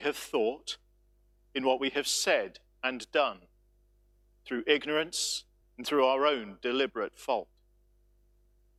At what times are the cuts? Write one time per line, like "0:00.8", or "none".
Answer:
0:05.6